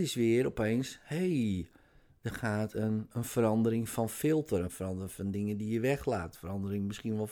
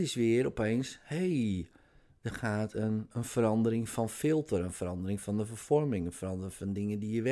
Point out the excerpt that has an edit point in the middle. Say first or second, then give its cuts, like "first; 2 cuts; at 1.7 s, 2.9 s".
first; 1 cut; at 4.6 s